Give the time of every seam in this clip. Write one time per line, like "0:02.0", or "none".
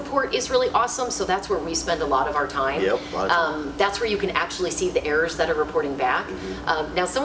none

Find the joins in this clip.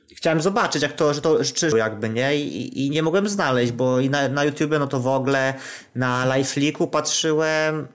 0:01.7

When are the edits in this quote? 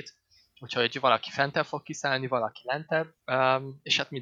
0:03.2

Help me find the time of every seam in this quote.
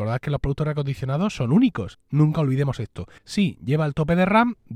0:01.9
0:03.2

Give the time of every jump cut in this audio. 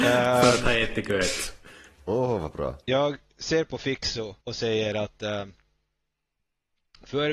0:02.8
0:04.4

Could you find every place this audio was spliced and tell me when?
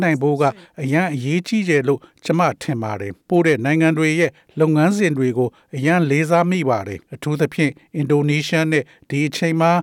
0:03.2
0:07.1

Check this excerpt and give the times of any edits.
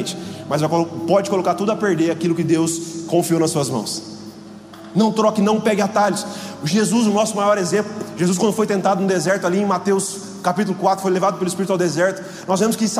none

